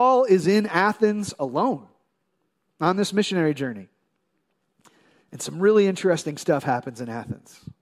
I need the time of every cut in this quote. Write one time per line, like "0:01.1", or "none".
none